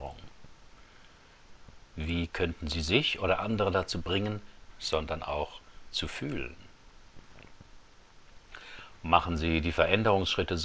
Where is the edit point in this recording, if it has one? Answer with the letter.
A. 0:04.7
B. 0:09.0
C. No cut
A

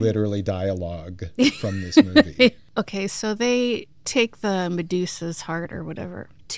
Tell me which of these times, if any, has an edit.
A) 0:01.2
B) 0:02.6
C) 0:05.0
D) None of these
B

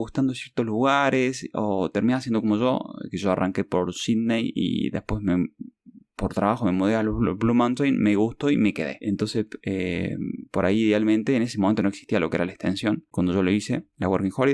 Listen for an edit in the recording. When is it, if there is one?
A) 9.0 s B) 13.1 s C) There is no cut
B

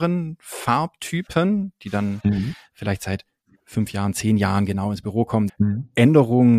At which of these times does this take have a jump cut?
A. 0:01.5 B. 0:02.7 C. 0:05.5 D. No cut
C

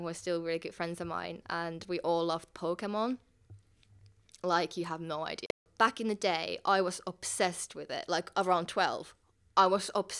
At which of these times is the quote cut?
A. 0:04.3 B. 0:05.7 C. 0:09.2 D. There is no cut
D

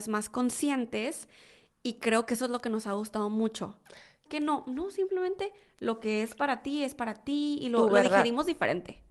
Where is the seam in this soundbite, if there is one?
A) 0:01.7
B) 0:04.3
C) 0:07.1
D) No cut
B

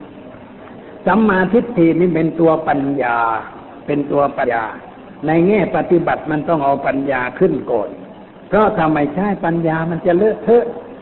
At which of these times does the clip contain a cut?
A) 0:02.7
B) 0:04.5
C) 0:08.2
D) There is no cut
B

